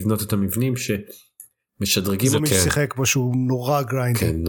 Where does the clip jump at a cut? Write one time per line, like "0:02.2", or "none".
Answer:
0:02.4